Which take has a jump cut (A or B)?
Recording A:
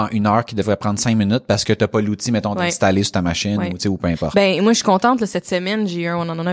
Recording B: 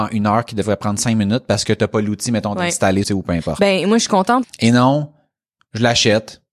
B